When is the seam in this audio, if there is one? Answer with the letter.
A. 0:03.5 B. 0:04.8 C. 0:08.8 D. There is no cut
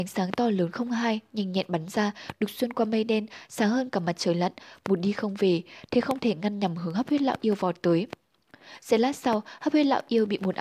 D